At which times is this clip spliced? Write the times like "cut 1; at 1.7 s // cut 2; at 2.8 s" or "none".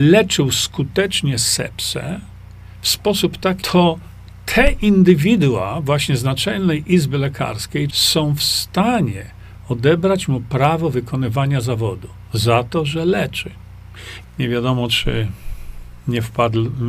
cut 1; at 3.6 s // cut 2; at 7.9 s // cut 3; at 14.2 s

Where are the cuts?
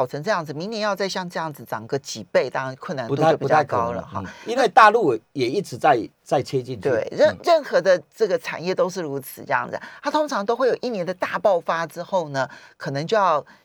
none

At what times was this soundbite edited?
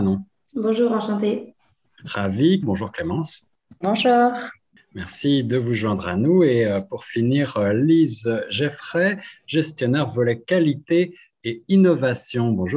cut 1; at 2.6 s

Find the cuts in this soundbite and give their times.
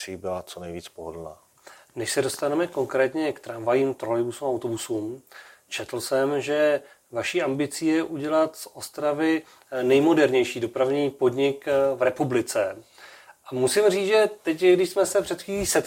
none

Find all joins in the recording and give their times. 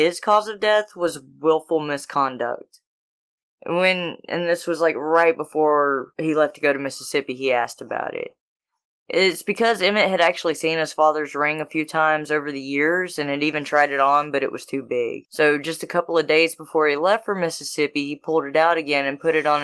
none

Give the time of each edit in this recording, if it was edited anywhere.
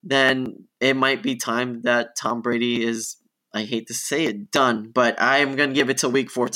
none

